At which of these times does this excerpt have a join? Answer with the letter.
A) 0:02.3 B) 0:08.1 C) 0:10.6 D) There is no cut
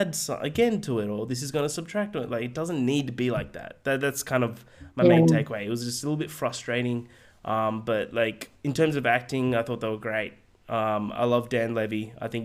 D